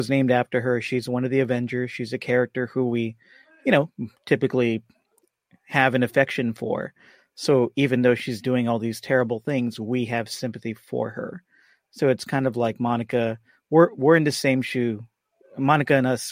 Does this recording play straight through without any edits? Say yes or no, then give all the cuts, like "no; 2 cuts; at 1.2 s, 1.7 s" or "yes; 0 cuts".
no; 1 cut; at 4.2 s